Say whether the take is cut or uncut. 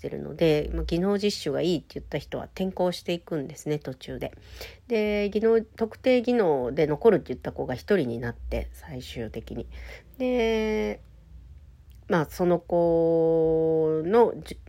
uncut